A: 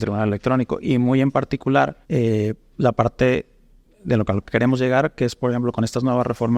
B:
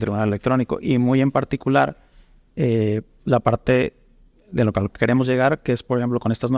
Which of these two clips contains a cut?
A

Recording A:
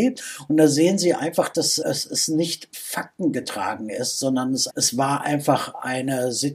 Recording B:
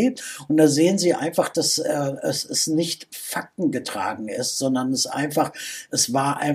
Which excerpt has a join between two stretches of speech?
A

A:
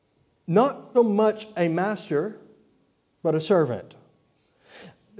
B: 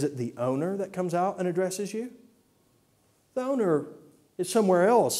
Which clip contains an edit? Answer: A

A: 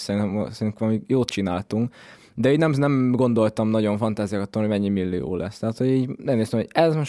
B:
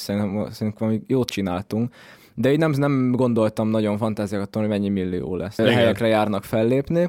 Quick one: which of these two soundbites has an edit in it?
B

